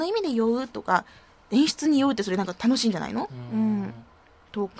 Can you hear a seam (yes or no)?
no